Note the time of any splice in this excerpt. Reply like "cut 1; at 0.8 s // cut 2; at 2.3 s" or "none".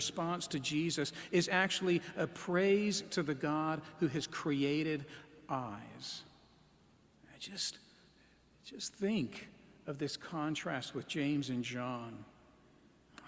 none

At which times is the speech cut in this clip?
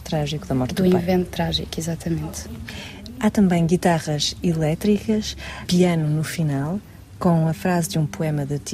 none

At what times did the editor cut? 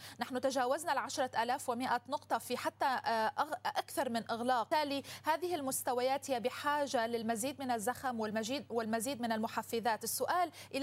cut 1; at 4.7 s

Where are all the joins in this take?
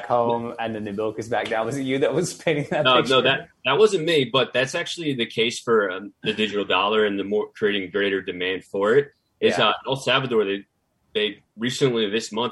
none

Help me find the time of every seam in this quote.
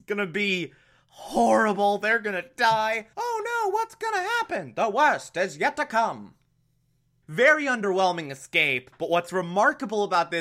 cut 1; at 3.1 s // cut 2; at 7.2 s

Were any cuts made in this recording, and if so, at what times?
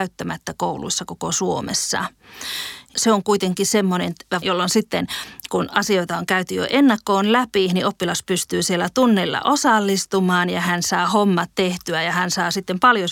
cut 1; at 4.4 s

